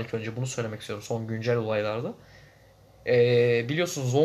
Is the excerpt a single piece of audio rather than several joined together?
yes; 0 cuts

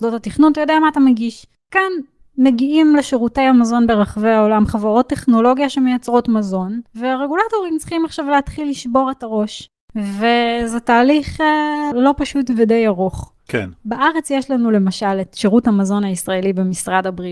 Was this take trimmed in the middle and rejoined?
yes; 1 cut; at 11.9 s

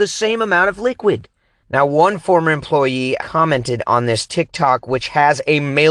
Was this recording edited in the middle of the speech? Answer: yes; 2 cuts; at 1.6 s, 3.2 s

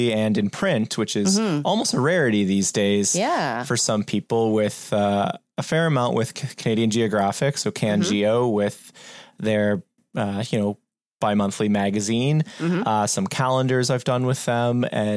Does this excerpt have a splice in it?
no; 0 cuts

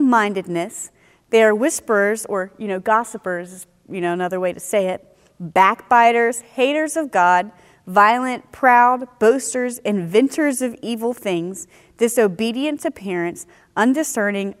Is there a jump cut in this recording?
no; 0 cuts

